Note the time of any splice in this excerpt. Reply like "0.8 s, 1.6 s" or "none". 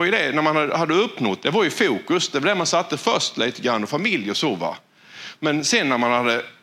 1.4 s